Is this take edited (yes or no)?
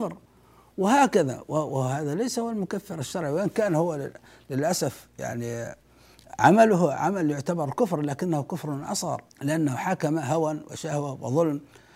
yes